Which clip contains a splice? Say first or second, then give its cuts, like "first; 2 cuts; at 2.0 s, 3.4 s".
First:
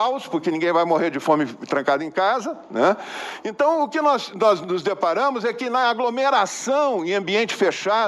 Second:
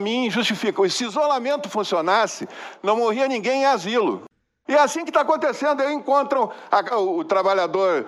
second; 2 cuts; at 4.6 s, 6.9 s